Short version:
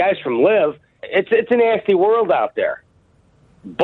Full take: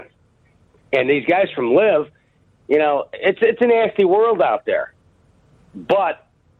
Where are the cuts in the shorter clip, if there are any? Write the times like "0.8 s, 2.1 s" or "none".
1.0 s